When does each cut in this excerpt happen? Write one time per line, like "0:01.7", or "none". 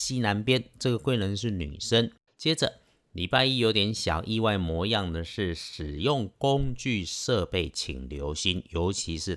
0:02.3